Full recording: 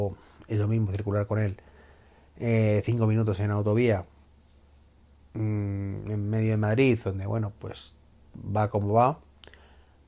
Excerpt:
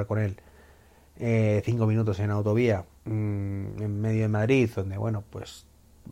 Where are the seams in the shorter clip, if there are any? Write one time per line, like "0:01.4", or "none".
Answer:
0:02.9